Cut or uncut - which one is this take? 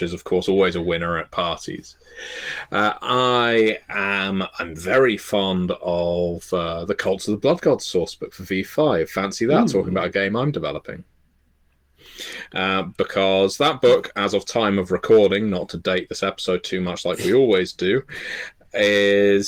uncut